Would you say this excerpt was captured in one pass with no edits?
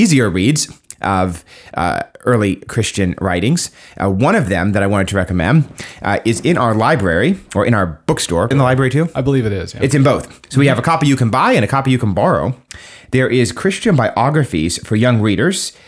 no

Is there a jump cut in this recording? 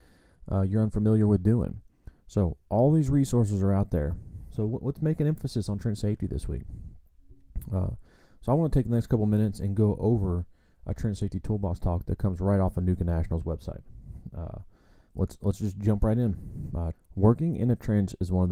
yes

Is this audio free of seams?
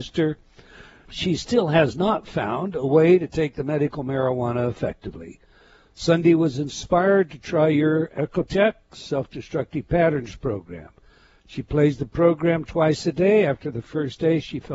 no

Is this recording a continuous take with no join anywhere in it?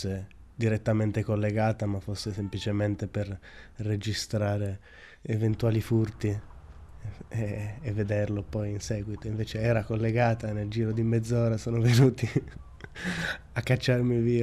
yes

